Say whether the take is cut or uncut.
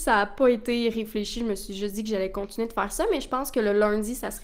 uncut